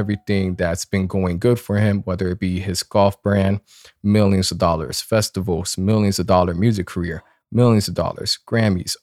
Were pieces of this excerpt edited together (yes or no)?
no